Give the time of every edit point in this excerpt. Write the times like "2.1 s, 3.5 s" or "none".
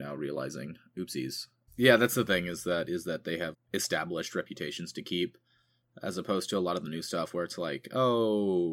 1.7 s, 3.5 s